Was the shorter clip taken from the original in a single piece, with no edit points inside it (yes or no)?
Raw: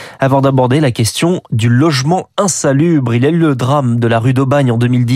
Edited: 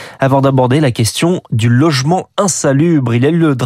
yes